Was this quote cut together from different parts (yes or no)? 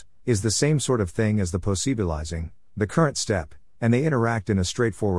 no